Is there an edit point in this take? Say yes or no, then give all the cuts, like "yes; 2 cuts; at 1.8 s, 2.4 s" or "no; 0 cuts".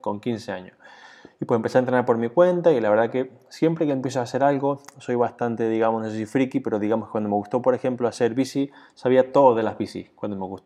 no; 0 cuts